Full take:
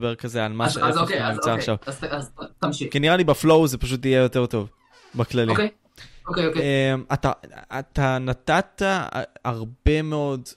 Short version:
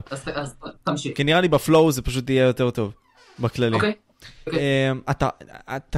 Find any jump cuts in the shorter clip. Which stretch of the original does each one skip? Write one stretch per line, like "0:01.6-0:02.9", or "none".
0:06.2-0:06.5